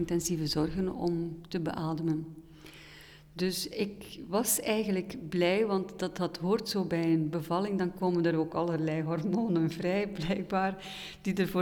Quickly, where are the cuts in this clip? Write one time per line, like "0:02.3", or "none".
none